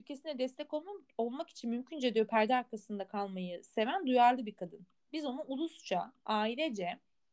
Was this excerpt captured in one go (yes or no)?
yes